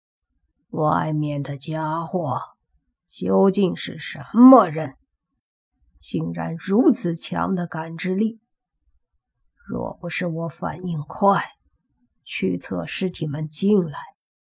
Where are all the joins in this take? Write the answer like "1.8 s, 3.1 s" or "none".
none

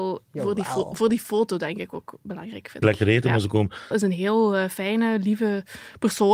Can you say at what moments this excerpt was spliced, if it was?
2.8 s, 3.9 s

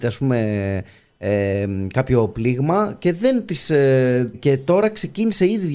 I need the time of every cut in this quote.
4.3 s

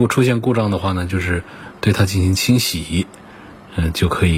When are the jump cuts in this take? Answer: none

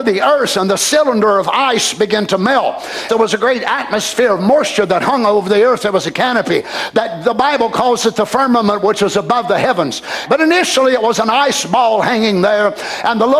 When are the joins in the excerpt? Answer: 3.1 s, 10.3 s

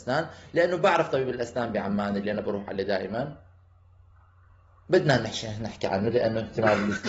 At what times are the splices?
none

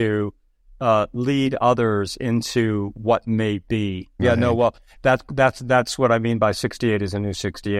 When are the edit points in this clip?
4.2 s

